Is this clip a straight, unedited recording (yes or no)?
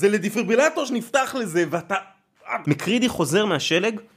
no